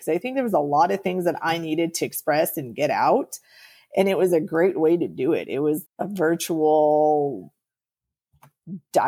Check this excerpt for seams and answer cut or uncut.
cut